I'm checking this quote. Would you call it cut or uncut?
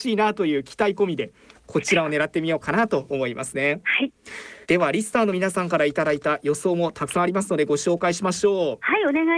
cut